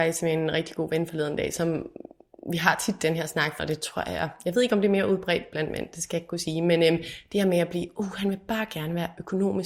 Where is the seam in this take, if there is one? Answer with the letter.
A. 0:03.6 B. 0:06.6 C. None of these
A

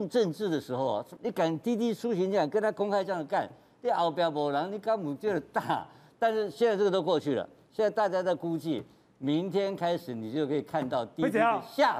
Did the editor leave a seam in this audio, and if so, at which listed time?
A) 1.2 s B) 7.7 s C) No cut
A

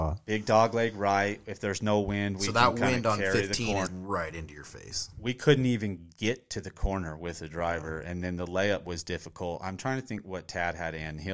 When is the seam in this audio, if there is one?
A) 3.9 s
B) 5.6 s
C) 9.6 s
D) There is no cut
A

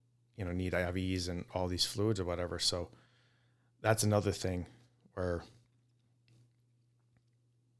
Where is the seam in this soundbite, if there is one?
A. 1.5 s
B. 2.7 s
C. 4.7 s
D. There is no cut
A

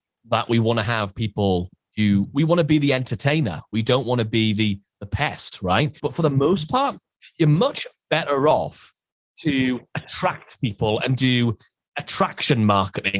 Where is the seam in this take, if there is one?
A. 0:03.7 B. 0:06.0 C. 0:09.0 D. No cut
B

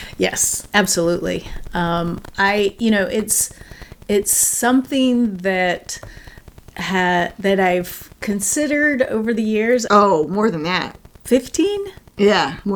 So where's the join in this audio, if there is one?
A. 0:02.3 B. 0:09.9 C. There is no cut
B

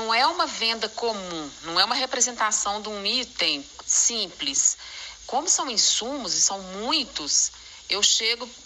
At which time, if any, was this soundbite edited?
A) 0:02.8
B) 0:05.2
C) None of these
C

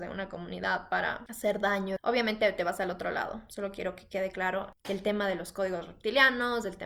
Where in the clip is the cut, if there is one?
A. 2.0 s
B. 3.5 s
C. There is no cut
A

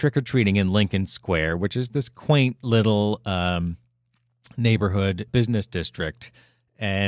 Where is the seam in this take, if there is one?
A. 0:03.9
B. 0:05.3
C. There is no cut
B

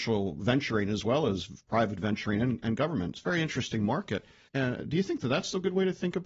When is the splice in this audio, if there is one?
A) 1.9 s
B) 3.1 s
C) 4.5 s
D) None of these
C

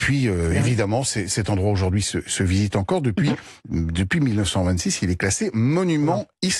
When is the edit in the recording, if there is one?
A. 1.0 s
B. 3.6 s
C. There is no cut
B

